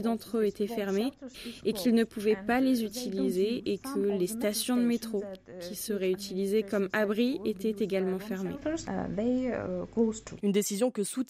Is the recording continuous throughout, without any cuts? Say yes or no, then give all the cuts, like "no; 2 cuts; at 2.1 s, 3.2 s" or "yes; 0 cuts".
no; 1 cut; at 10.4 s